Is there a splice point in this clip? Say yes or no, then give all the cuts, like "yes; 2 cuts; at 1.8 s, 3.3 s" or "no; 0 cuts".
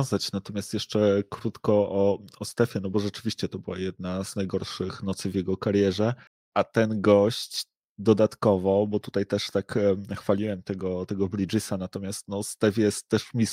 no; 0 cuts